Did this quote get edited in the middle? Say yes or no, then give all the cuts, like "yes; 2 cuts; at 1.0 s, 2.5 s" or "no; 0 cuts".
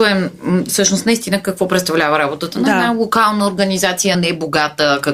yes; 1 cut; at 4.1 s